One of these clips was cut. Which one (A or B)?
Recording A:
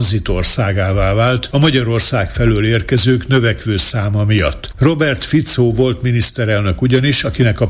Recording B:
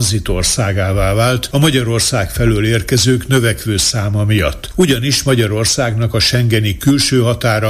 A